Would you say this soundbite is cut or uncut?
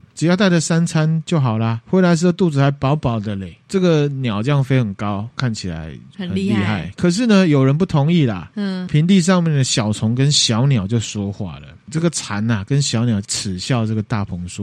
cut